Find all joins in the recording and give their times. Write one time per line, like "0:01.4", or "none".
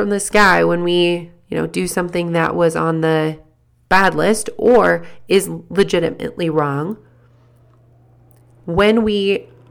none